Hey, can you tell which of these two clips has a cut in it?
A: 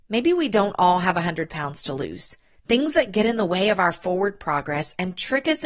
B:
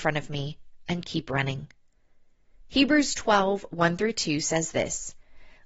A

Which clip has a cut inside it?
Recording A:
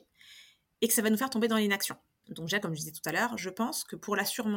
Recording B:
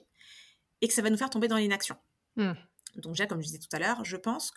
A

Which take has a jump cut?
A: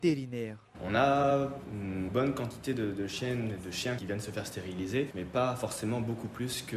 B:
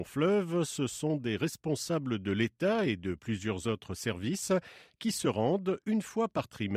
A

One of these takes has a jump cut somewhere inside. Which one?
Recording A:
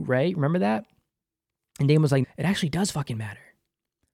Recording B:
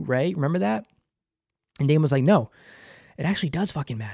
A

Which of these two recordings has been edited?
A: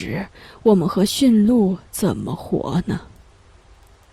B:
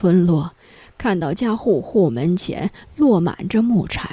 B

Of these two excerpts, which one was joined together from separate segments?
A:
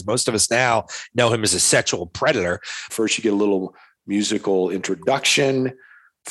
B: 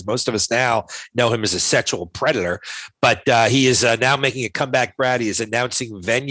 A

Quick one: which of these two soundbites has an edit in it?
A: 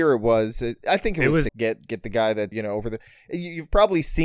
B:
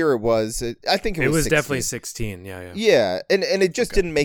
A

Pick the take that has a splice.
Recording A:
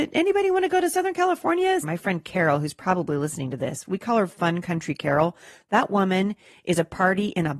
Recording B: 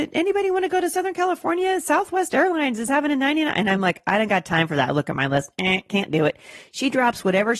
A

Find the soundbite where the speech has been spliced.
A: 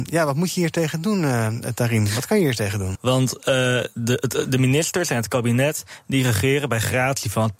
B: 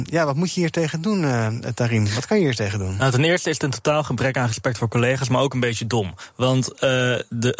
A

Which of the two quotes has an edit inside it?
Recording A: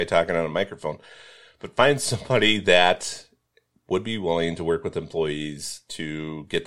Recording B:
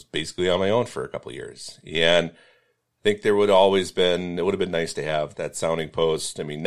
B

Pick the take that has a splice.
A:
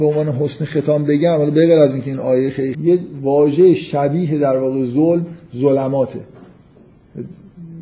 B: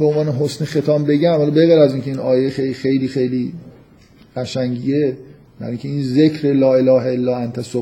A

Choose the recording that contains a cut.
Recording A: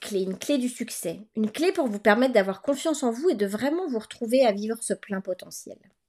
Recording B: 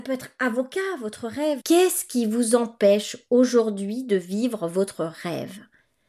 B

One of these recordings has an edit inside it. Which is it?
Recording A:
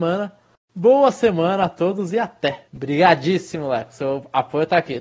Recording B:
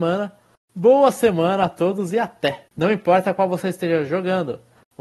B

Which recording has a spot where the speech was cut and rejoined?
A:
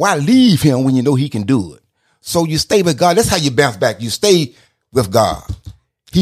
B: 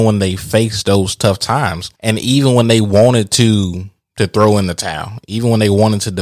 B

